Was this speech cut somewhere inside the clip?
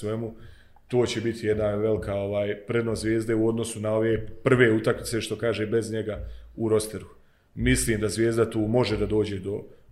no; 0 cuts

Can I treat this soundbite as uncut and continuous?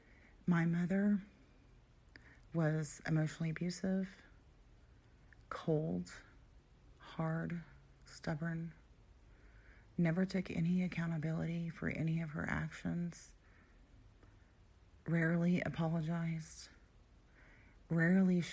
yes; 0 cuts

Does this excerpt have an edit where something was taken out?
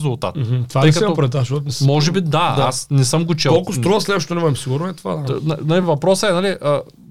no; 0 cuts

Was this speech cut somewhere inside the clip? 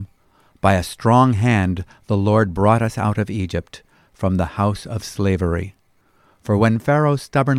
no; 0 cuts

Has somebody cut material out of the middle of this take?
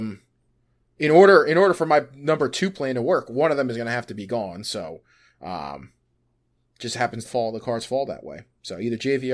yes; 1 cut; at 7.3 s

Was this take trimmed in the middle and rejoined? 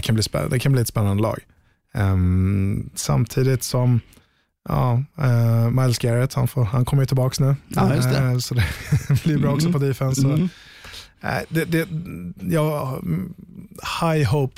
no; 0 cuts

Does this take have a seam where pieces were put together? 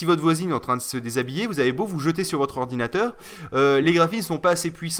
no; 0 cuts

